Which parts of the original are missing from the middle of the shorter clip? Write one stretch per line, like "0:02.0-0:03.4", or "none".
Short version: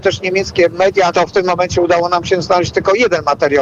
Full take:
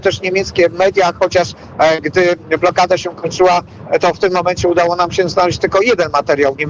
0:01.1-0:04.0

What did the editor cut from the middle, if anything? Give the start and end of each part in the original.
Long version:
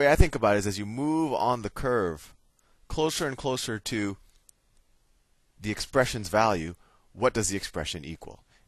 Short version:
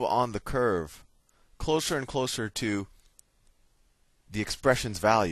none

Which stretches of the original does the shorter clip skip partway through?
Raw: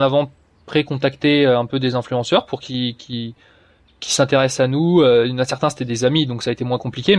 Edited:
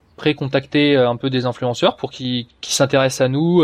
0:03.0-0:03.9

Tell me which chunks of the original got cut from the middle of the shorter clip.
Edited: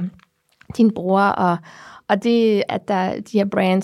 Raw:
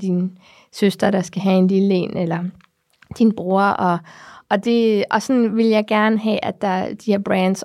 0:05.1-0:06.4

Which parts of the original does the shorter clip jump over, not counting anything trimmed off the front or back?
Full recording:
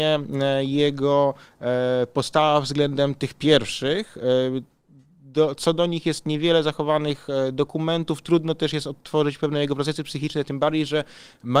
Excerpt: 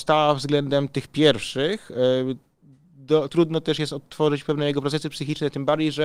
0:05.6-0:08.2

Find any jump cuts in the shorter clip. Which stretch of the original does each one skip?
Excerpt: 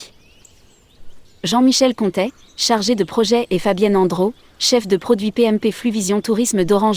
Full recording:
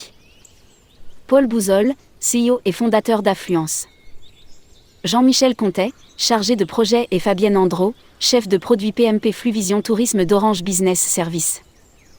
0:01.2-0:04.9

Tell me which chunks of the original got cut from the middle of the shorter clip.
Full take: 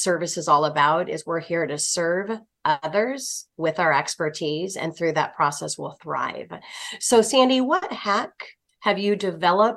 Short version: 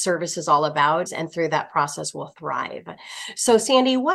0:01.1-0:04.7

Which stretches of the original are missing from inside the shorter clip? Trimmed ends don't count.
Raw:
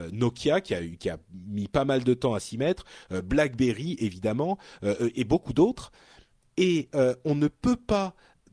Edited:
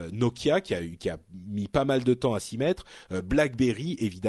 none

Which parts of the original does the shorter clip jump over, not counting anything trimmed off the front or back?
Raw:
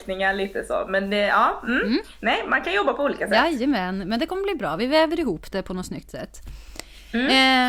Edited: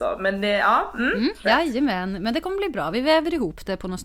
0:02.1-0:03.3

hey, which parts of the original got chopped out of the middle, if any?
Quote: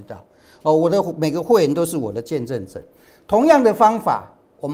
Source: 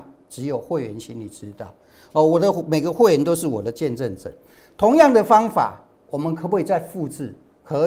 none

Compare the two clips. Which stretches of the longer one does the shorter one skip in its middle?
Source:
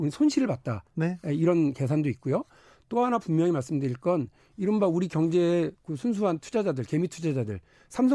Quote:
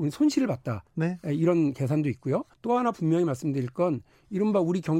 0:02.5-0:02.8

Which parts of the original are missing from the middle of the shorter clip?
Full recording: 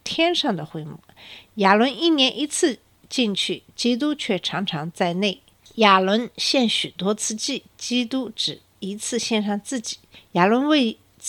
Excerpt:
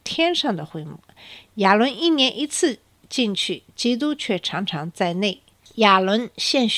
none

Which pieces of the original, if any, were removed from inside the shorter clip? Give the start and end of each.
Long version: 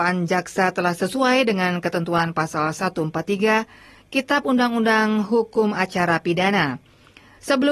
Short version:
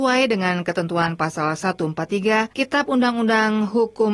0:03.7-0:04.1

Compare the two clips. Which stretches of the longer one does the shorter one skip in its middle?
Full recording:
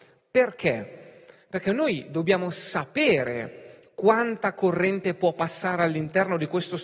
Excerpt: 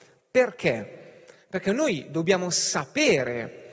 none

